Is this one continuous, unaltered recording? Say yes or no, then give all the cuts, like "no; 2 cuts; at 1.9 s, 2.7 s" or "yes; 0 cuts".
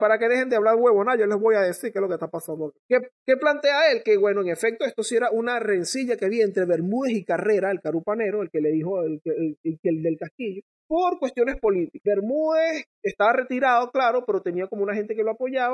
yes; 0 cuts